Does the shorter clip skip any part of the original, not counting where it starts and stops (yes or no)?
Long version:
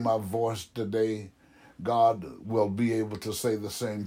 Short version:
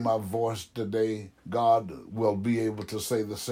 yes